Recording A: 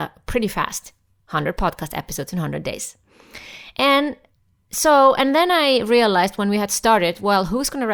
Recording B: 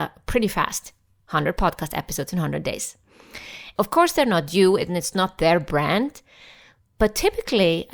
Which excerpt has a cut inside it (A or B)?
B